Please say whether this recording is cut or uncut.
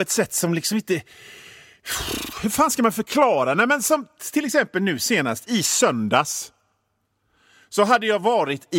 uncut